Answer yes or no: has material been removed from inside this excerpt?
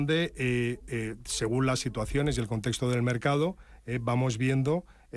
no